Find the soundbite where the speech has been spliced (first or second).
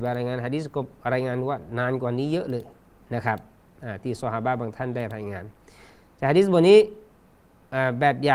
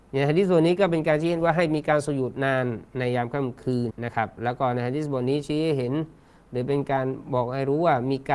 second